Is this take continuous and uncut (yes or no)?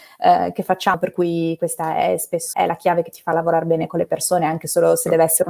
no